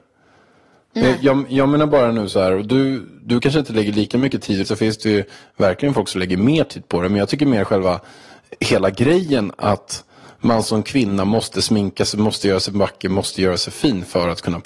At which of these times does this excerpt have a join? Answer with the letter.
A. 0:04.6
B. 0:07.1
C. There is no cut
A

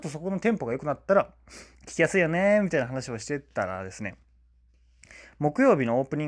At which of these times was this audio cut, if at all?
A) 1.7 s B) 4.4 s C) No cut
A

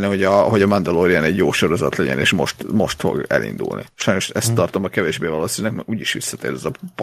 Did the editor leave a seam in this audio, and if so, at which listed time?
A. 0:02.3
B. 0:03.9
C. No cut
C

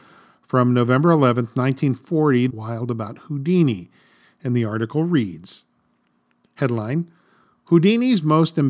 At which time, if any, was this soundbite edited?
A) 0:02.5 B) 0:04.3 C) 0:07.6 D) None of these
A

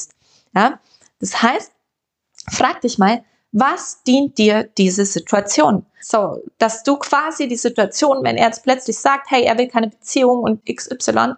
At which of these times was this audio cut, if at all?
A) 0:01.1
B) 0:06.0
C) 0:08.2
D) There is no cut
B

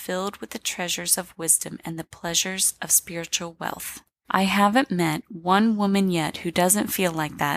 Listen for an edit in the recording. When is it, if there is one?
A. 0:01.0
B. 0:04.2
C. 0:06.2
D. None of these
B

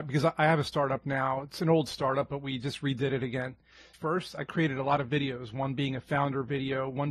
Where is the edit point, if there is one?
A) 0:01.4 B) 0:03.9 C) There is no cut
B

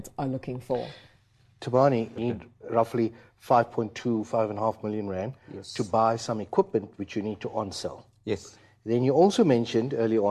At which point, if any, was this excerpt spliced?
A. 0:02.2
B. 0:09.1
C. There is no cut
A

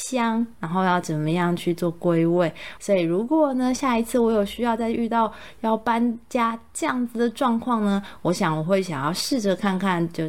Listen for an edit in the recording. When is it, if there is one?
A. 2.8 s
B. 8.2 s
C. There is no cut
A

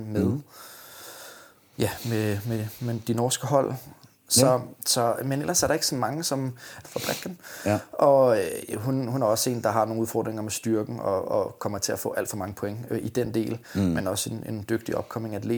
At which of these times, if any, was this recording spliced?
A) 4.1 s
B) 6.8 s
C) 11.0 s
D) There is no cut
B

